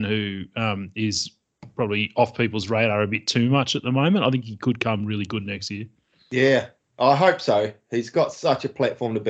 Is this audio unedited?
yes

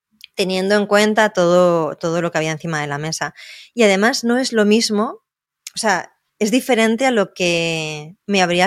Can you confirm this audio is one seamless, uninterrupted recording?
no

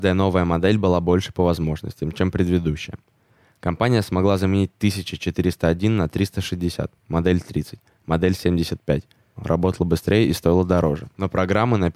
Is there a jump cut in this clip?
yes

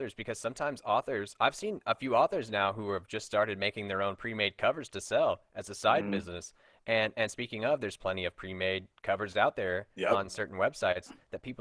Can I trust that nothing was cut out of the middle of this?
yes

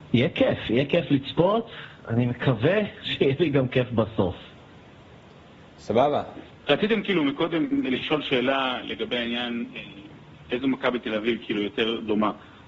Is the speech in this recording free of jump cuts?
yes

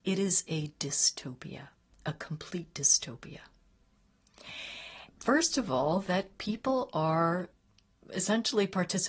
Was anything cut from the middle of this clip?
yes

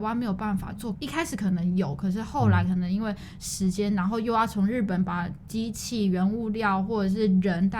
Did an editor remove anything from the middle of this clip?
yes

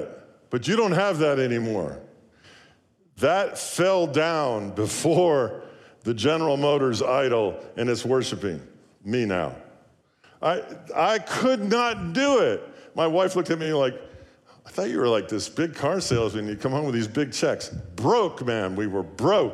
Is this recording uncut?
yes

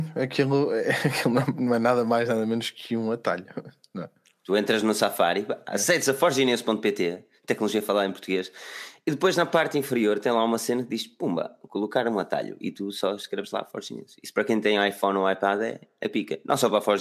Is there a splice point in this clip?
no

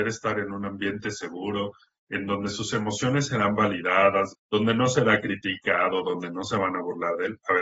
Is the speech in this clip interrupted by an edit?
yes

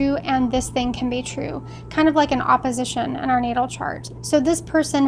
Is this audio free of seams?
no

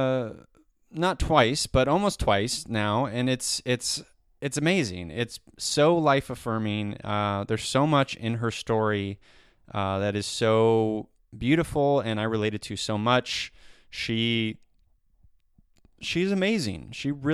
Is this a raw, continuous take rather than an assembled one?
yes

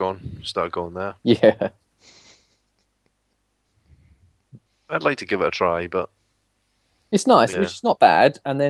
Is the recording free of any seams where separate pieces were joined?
no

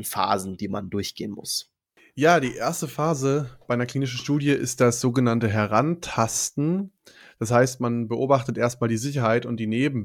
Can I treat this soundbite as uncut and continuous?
yes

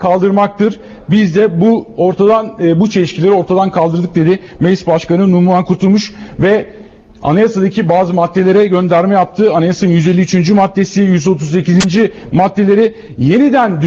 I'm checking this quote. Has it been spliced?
no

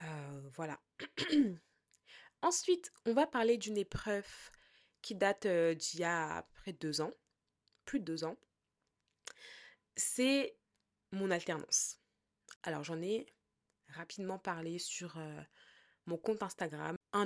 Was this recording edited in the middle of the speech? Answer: no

